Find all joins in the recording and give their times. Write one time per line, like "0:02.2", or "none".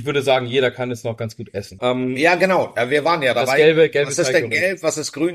0:01.8

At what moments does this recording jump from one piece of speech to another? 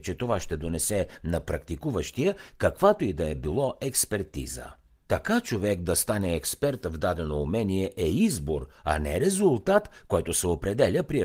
0:05.0

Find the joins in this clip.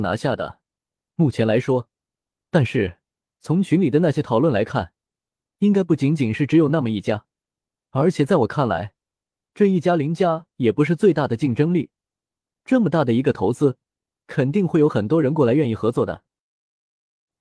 0:02.3

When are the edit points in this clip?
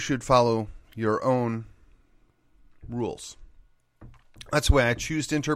none

